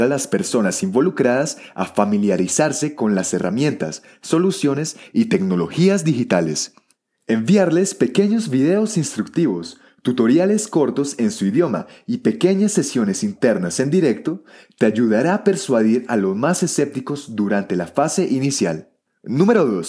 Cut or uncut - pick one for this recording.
uncut